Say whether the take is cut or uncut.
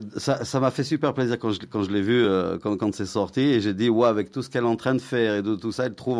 uncut